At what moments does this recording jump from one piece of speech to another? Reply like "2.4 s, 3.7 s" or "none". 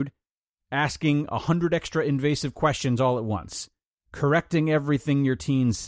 3.9 s